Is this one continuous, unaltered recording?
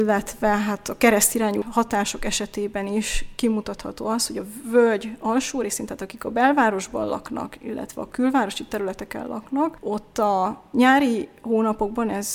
yes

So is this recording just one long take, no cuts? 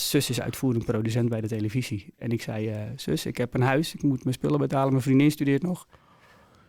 yes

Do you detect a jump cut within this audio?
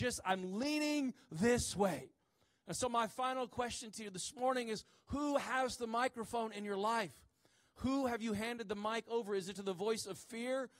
no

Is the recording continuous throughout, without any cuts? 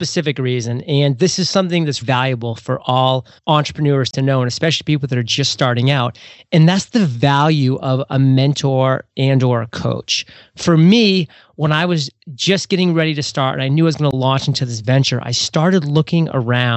no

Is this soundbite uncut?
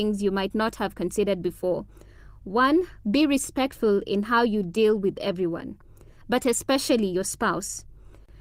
yes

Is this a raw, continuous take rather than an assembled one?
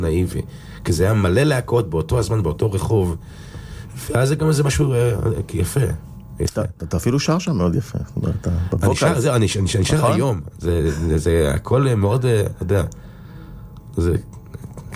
yes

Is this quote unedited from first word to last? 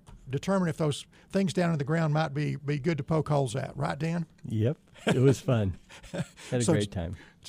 yes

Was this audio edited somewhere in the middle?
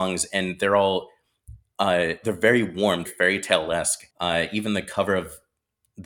yes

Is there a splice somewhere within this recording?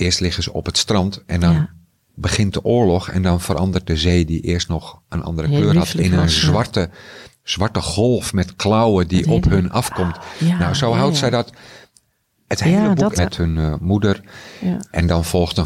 yes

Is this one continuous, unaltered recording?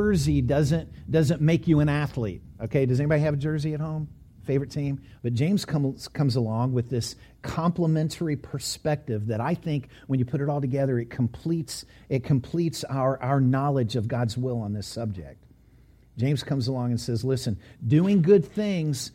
no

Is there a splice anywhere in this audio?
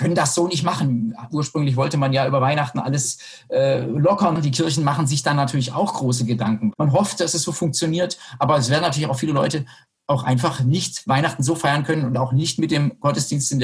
yes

